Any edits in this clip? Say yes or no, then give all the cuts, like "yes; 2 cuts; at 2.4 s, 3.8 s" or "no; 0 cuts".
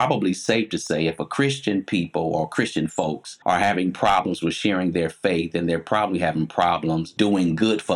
no; 0 cuts